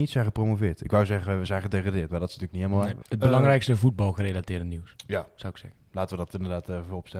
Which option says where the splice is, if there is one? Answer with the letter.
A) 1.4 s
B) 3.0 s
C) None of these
B